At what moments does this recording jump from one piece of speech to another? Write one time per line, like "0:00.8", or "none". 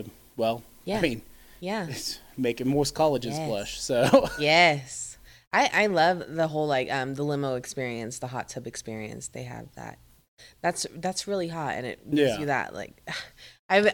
none